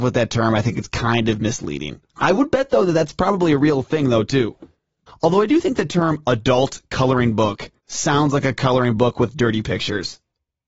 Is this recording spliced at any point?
yes; 3 cuts; at 2.1 s, 5.1 s, 7.8 s

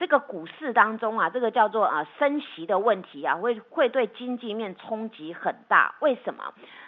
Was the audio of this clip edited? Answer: no; 0 cuts

